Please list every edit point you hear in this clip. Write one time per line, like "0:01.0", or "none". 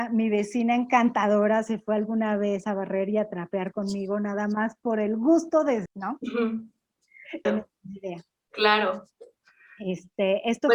0:05.9
0:07.5